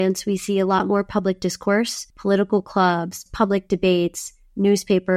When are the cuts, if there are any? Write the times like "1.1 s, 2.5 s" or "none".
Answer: 2.1 s, 3.3 s

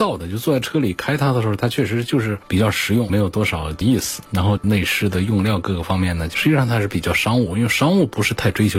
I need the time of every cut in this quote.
none

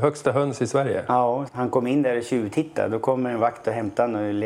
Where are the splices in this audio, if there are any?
1.5 s

